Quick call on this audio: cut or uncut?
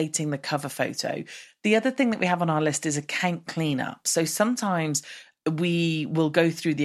cut